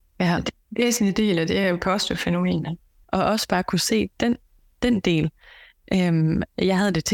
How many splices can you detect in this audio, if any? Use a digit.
1